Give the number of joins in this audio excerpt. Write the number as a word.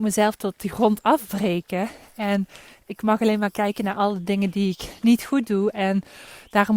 zero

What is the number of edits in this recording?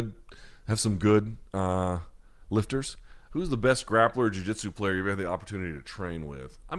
one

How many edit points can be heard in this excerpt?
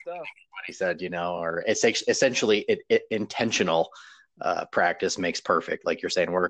zero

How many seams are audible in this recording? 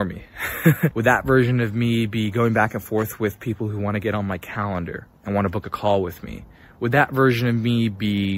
two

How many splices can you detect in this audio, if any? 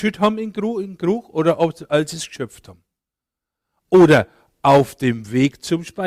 zero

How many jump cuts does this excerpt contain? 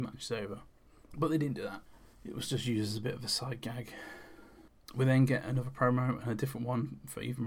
zero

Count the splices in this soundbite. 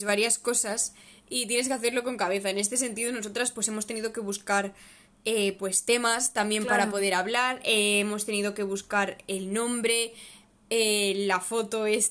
zero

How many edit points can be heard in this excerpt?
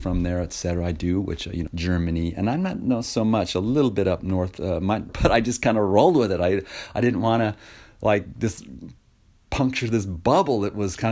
two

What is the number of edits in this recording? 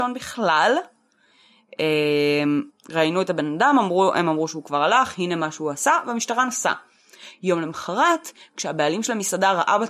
one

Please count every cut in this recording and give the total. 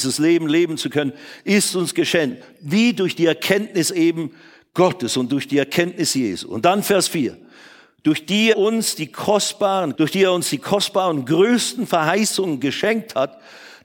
two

